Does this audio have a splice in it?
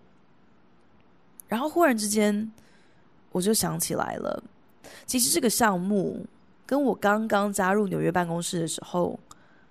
no; 0 cuts

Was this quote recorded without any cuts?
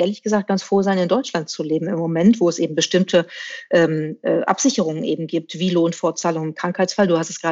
yes; 0 cuts

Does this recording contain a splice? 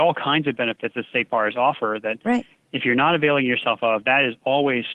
no; 0 cuts

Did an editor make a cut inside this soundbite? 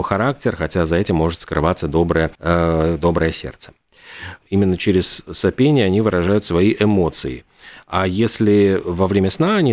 yes; 2 cuts; at 2.3 s, 4.4 s

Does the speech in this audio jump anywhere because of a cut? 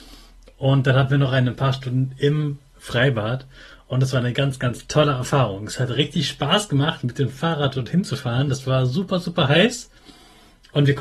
no; 0 cuts

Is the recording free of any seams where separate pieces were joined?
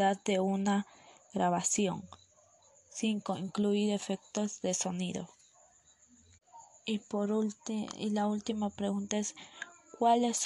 yes; 0 cuts

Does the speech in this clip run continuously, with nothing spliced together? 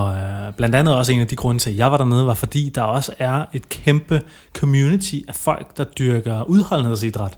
yes; 0 cuts

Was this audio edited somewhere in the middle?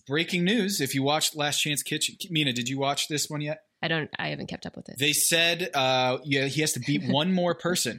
yes; 1 cut; at 3.8 s

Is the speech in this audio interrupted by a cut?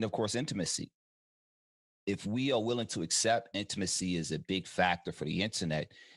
no; 0 cuts

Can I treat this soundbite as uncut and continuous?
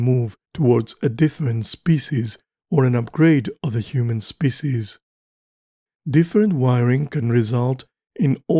no; 1 cut; at 6.0 s

